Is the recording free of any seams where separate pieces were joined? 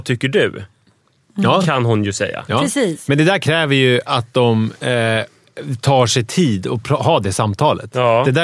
yes; 0 cuts

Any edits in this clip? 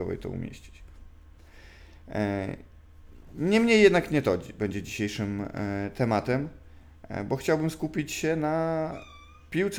no; 0 cuts

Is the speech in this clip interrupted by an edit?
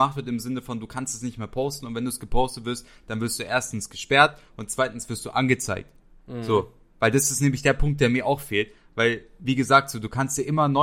no; 0 cuts

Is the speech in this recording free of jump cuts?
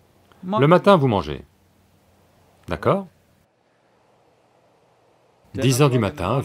yes; 0 cuts

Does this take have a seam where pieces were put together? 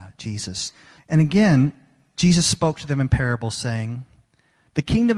yes; 1 cut; at 1.0 s

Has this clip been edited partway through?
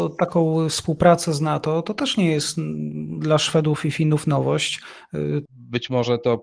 yes; 1 cut; at 5.5 s

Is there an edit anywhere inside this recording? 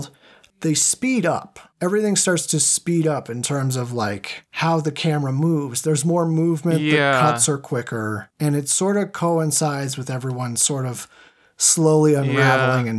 no; 0 cuts

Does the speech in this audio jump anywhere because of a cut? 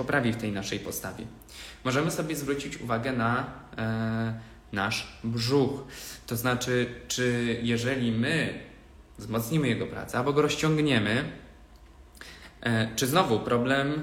no; 0 cuts

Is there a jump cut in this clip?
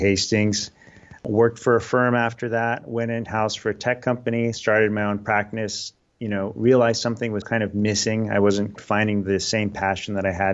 yes; 2 cuts; at 7.4 s, 8.8 s

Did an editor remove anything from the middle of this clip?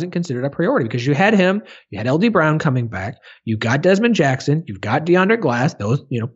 no; 0 cuts

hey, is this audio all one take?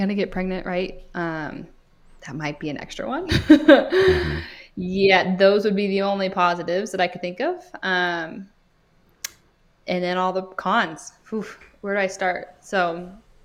yes; 0 cuts

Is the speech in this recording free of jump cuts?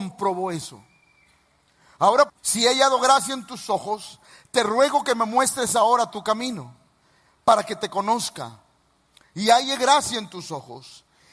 no; 1 cut; at 2.3 s

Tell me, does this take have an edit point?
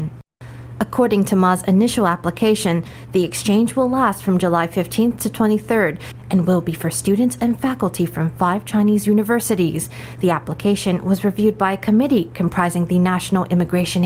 no; 0 cuts

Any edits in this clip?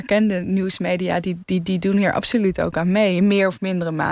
no; 0 cuts

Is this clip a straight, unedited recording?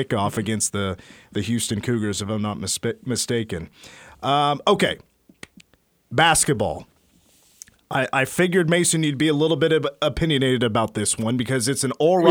yes; 0 cuts

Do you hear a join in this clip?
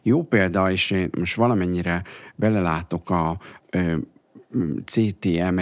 yes; 1 cut; at 3.6 s

